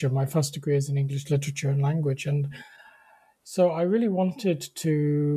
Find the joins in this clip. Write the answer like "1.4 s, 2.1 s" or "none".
none